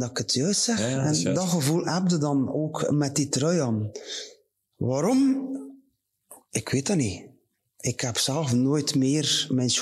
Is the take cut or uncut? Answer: uncut